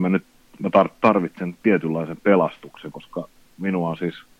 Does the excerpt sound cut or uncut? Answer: uncut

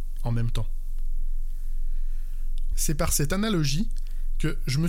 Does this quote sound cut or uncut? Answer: cut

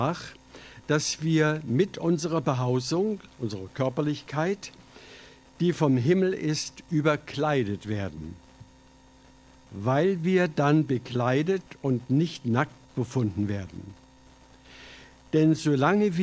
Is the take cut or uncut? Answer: uncut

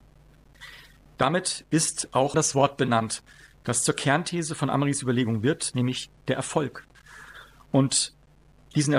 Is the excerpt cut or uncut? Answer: cut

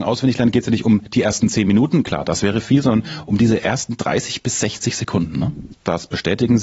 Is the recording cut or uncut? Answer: cut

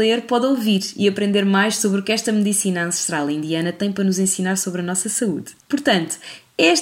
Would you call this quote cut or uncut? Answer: cut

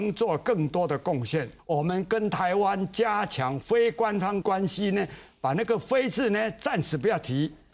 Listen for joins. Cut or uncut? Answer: cut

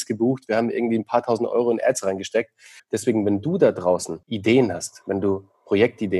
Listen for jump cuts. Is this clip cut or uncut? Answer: cut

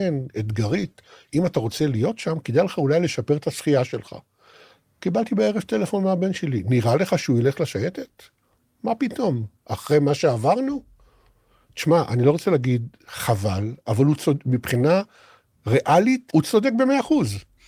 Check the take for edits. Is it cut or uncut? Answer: cut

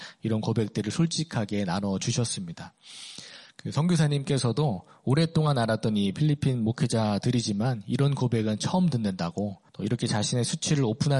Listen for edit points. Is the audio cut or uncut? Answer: cut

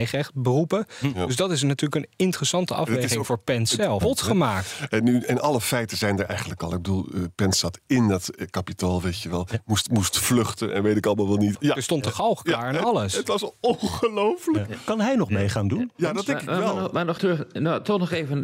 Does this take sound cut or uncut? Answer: cut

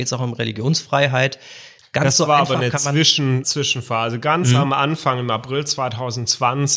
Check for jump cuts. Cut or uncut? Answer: cut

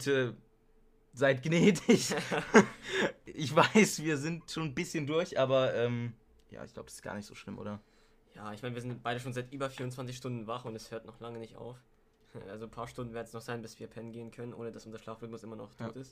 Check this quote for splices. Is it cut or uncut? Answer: uncut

